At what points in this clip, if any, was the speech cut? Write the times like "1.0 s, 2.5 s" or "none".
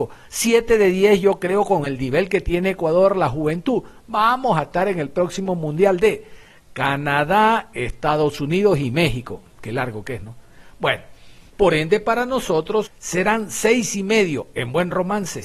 11.5 s, 12.9 s